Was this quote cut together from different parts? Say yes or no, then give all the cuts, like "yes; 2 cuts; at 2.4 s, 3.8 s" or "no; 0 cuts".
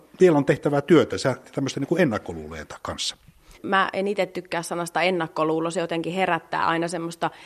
yes; 1 cut; at 3.6 s